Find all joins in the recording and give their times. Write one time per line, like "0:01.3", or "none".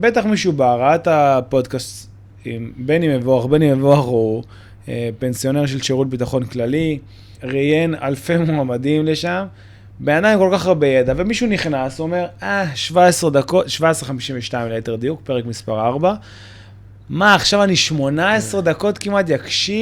0:07.4